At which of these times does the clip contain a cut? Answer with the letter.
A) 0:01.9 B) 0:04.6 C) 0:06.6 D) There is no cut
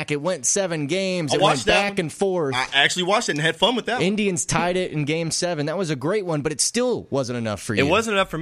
D